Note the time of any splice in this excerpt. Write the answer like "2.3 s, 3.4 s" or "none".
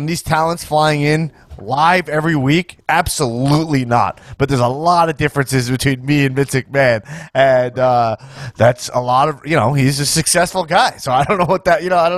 none